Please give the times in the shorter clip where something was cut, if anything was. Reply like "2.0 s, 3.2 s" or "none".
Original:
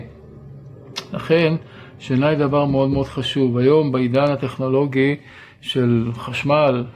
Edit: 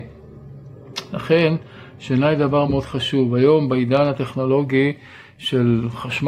2.7 s